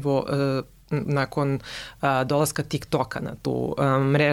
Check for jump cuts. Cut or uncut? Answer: uncut